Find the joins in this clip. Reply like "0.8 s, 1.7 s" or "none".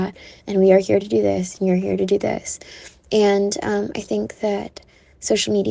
none